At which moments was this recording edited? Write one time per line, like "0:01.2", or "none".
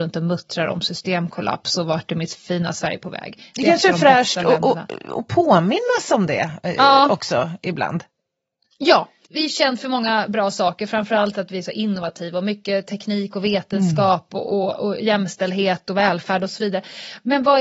none

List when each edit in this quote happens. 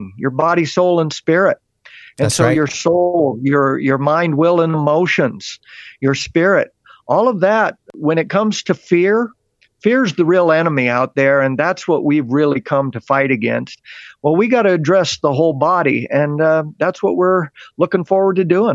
none

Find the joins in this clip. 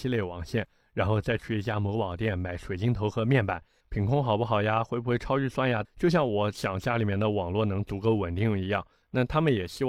0:03.8
0:05.8

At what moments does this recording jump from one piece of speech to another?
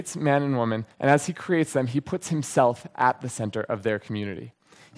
none

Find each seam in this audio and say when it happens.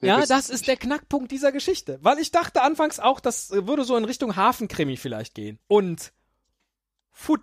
0:05.6

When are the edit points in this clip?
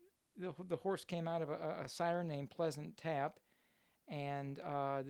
none

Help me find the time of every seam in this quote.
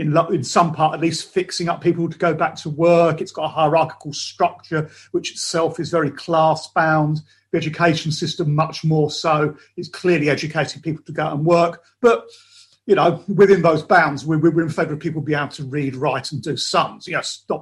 none

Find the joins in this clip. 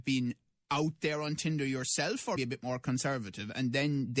0:02.4

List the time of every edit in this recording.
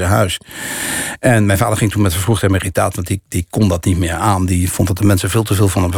none

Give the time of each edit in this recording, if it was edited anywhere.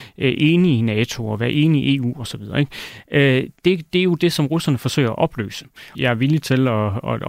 0:03.9
0:05.9

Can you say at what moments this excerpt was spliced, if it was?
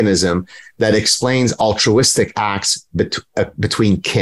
none

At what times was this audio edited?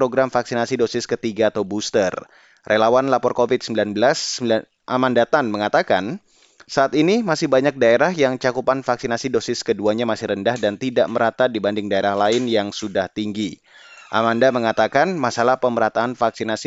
none

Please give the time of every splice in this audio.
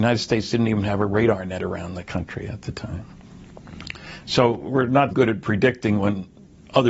0:05.1

